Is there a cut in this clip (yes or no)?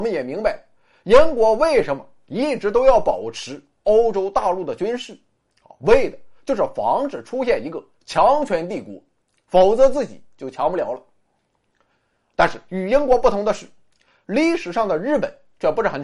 no